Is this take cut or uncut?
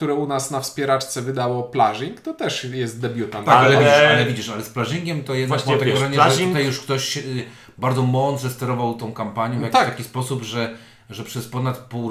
uncut